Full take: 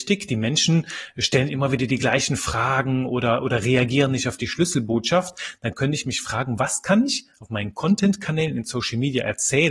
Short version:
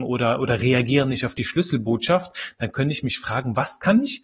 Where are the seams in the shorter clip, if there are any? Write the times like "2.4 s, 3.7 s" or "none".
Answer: none